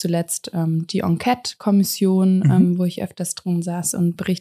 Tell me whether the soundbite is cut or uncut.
uncut